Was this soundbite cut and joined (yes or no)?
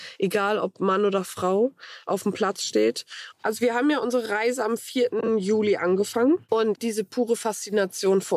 yes